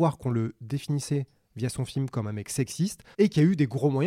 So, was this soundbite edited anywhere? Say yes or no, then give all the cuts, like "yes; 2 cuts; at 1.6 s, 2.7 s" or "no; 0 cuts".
yes; 1 cut; at 3.1 s